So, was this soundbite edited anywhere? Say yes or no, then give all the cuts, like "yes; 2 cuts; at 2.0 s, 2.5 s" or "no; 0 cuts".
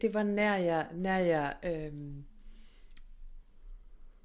no; 0 cuts